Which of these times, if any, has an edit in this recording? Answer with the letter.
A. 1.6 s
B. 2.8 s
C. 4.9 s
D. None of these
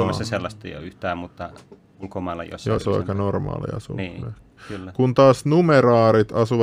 B